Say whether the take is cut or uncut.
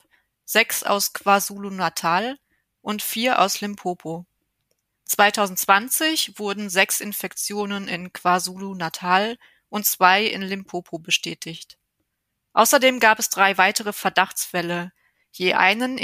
cut